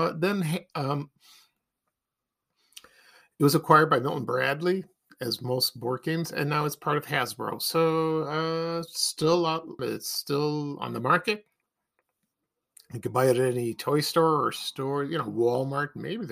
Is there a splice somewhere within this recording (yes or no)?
yes